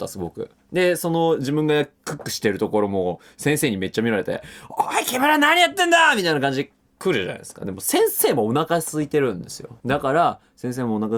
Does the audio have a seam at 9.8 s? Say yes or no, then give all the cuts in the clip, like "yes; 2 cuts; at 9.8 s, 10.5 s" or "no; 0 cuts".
yes; 1 cut; at 9.8 s